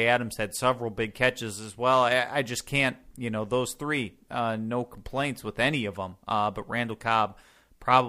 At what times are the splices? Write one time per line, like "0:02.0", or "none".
none